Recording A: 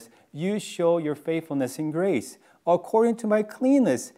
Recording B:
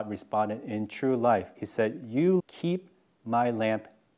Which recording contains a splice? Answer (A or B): B